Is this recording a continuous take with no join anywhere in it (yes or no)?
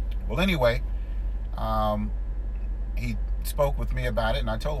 yes